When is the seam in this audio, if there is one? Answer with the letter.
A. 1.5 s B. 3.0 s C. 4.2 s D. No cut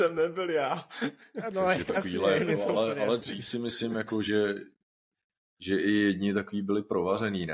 D